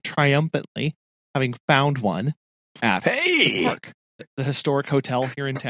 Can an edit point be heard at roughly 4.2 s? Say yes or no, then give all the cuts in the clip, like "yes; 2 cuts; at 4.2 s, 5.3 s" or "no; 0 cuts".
yes; 1 cut; at 4.2 s